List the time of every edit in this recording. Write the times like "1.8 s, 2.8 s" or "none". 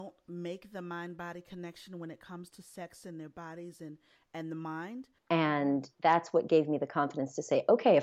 5.2 s